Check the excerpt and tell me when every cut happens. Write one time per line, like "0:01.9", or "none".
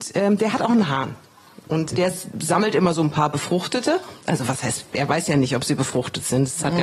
0:01.9